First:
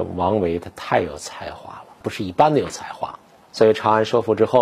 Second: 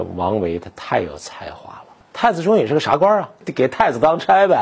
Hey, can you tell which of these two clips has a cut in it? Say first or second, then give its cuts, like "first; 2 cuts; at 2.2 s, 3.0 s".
second; 1 cut; at 2.0 s